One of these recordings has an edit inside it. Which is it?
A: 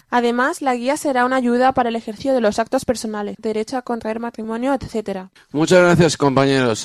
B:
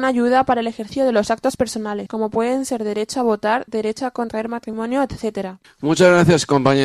A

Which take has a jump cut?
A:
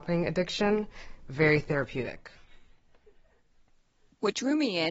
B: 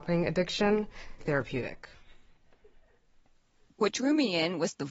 B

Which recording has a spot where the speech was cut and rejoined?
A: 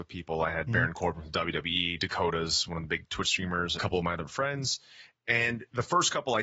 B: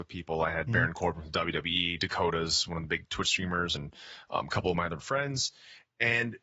A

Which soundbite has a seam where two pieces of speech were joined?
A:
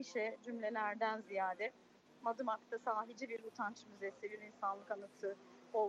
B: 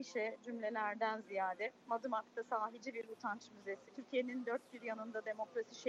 B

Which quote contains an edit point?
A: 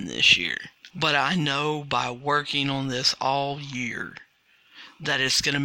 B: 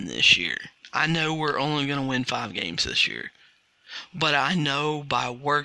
A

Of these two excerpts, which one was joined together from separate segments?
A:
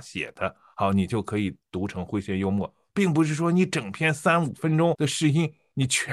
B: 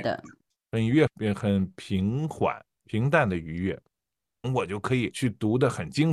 B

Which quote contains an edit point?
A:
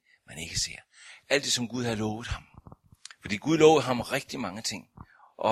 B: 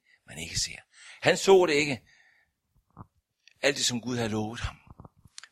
A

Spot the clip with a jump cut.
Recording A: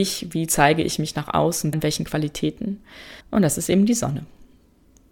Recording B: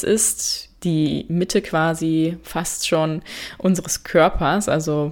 A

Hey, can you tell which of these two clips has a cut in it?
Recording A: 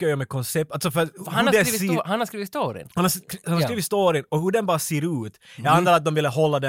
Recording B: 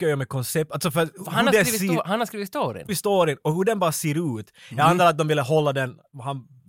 B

